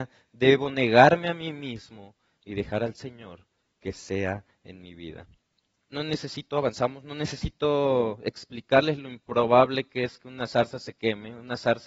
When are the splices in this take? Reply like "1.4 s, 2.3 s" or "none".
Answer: 5.9 s

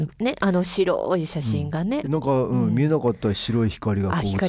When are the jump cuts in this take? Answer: 2.0 s

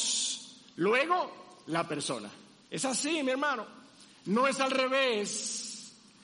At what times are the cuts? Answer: 2.6 s

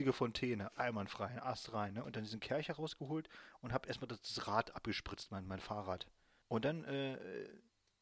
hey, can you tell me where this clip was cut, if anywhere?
2.0 s, 6.4 s

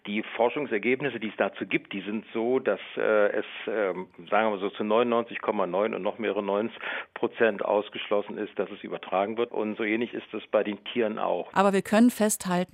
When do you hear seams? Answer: 9.5 s, 11.5 s

